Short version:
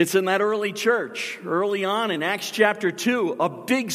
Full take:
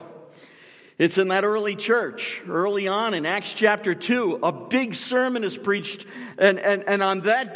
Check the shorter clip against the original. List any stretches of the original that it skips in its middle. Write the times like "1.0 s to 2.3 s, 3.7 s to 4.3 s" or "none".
none